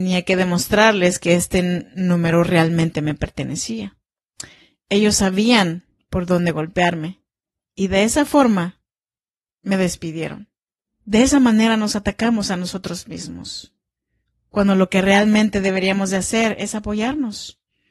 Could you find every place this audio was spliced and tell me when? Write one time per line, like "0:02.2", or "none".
none